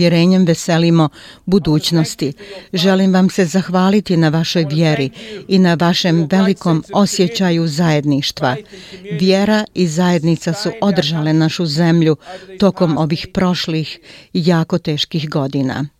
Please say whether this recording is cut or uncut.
uncut